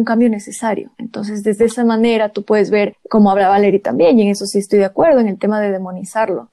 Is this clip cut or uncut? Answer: cut